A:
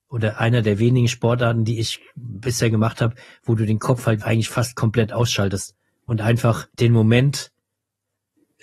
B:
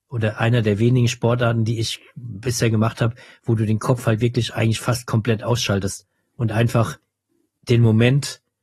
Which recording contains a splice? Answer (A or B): A